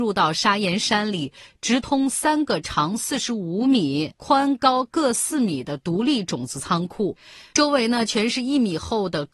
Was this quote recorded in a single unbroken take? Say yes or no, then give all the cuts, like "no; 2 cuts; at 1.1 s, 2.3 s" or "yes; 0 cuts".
yes; 0 cuts